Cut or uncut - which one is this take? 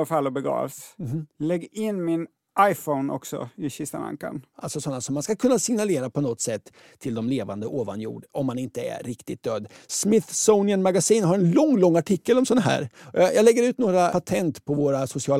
cut